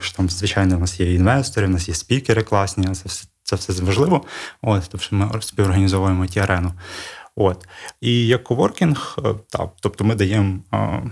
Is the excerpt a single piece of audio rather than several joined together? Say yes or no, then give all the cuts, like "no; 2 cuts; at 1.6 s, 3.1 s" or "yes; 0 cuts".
yes; 0 cuts